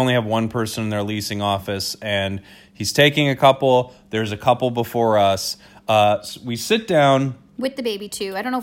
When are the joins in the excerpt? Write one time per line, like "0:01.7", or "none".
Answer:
none